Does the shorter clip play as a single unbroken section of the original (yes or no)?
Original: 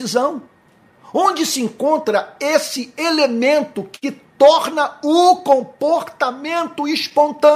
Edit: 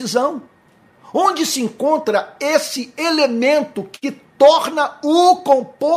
yes